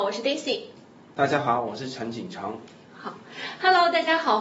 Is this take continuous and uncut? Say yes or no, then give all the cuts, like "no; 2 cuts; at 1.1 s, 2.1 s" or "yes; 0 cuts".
no; 1 cut; at 2.9 s